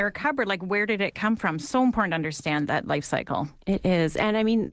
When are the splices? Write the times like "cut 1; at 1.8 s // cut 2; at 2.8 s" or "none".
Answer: none